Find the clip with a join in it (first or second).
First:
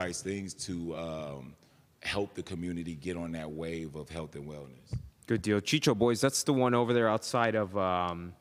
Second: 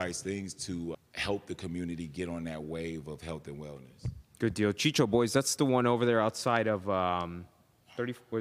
second